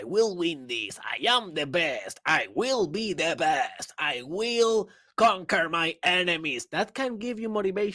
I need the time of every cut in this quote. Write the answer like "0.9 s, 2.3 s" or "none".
none